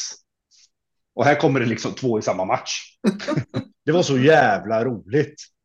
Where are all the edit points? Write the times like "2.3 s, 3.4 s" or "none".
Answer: 3.7 s